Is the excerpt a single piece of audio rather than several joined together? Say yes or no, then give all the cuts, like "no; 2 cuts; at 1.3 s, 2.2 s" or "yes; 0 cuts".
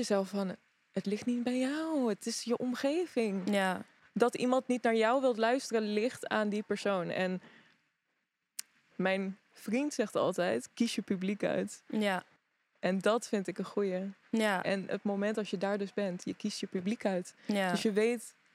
yes; 0 cuts